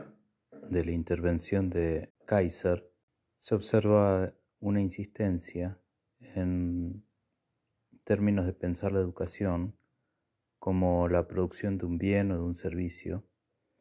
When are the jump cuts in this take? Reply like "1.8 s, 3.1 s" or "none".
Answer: none